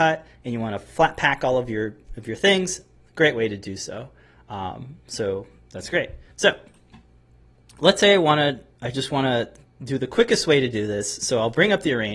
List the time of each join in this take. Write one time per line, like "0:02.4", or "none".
0:06.3